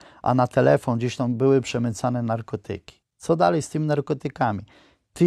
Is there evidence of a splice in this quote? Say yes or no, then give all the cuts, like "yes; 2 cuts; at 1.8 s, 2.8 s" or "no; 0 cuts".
yes; 1 cut; at 3.0 s